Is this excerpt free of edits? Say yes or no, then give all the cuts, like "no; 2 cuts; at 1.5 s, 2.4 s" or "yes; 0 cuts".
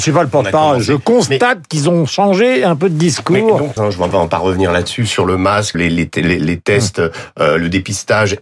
no; 2 cuts; at 3.8 s, 5.7 s